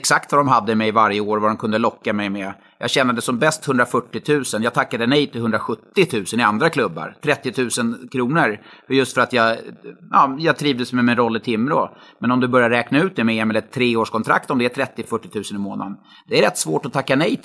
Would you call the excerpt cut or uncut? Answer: uncut